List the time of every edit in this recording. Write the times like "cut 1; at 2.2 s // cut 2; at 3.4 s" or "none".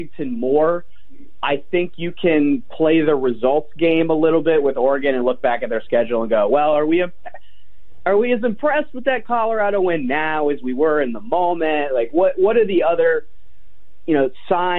none